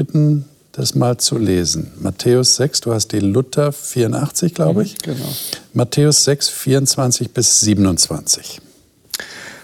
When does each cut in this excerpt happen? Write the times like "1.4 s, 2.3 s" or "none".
none

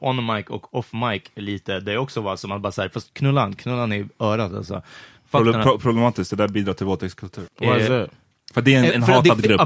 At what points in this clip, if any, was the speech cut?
7.5 s

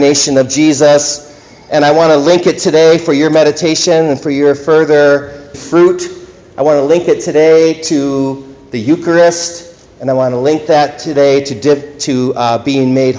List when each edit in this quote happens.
5.5 s

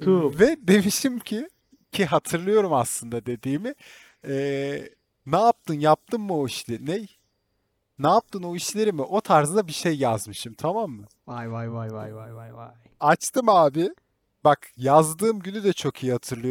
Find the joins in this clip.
none

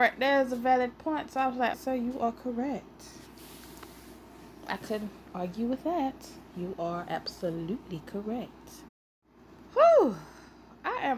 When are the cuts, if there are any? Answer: 1.7 s

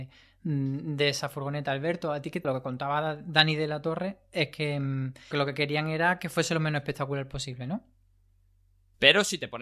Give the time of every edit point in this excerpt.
2.4 s, 5.3 s

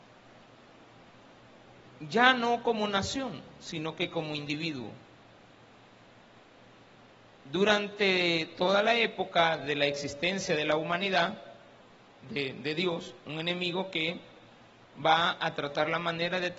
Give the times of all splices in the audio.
12.2 s

